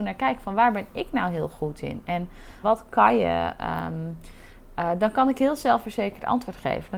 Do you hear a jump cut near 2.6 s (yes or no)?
yes